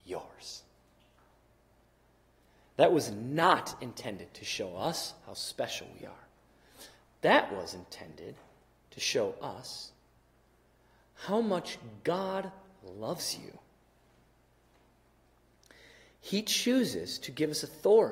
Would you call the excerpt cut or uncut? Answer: uncut